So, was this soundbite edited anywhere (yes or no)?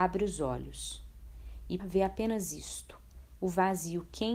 yes